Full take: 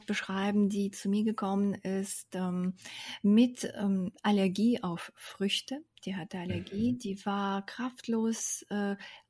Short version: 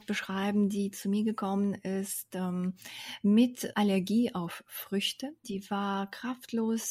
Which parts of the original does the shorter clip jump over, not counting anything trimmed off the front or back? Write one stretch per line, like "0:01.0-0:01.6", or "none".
0:03.7-0:04.2
0:05.9-0:07.0